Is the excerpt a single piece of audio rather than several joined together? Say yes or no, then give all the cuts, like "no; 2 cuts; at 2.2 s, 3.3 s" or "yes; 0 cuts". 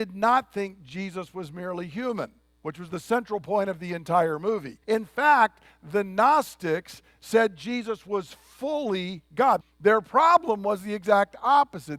no; 2 cuts; at 4.8 s, 9.6 s